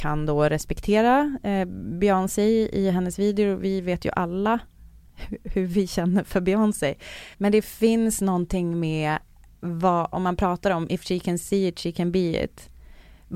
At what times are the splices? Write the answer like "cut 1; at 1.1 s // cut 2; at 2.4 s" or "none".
cut 1; at 7.3 s // cut 2; at 10.1 s

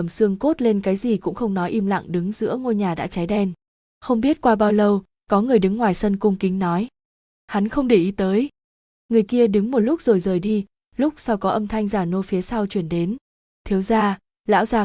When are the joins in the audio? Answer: cut 1; at 3.8 s // cut 2; at 13.5 s

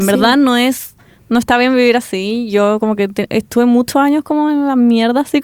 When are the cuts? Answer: cut 1; at 3.3 s

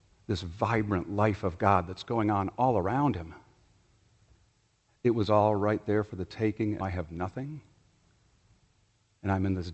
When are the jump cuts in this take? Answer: cut 1; at 4.9 s // cut 2; at 6.8 s

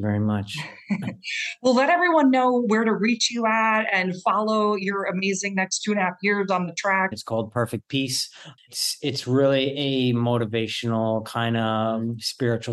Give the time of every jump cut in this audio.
cut 1; at 7.1 s

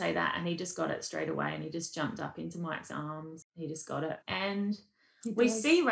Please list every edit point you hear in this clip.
cut 1; at 4.2 s

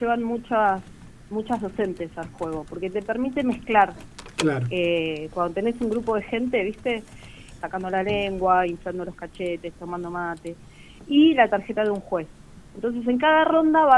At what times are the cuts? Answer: cut 1; at 7.6 s

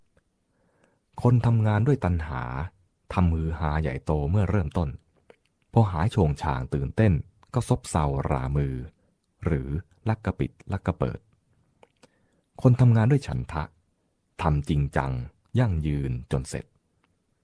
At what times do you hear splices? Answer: none

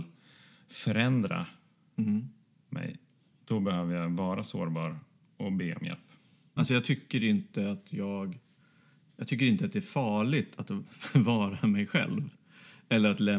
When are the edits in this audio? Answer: cut 1; at 6.6 s

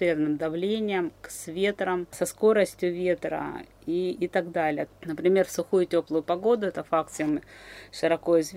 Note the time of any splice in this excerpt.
cut 1; at 4.9 s

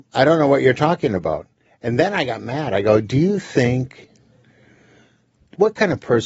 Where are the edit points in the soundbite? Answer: none

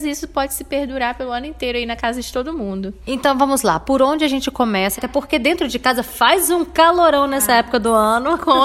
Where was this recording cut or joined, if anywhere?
cut 1; at 5.0 s

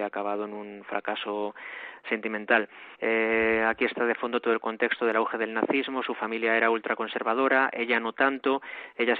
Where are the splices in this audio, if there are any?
cut 1; at 2.9 s

